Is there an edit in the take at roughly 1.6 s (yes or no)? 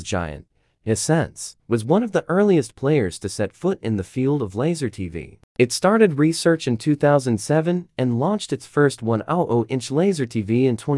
yes